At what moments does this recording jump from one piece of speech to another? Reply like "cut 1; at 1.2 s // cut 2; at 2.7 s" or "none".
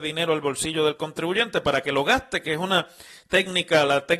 none